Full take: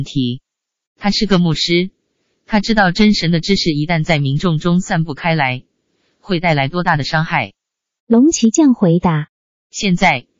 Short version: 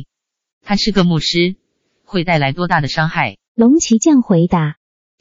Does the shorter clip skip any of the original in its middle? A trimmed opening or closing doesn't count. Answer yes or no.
yes